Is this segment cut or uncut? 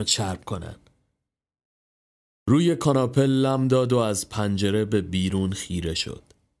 uncut